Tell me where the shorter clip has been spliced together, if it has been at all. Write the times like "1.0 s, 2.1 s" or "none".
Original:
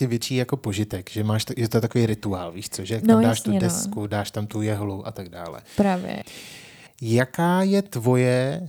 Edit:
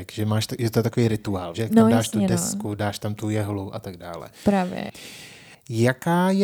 1.5 s